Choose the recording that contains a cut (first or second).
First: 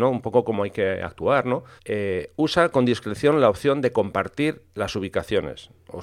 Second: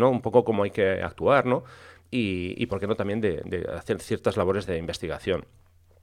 first